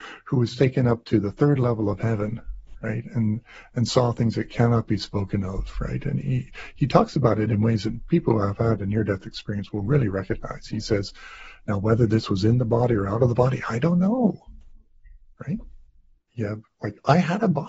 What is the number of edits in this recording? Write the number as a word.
zero